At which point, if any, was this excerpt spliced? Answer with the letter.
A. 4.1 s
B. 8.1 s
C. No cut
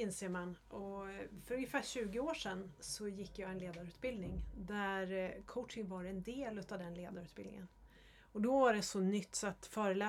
C